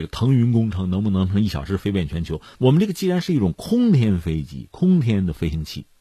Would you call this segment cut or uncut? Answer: cut